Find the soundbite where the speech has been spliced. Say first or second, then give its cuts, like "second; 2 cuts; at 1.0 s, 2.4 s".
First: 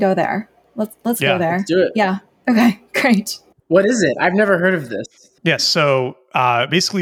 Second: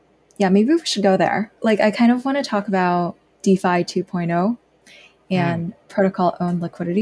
second; 1 cut; at 1.6 s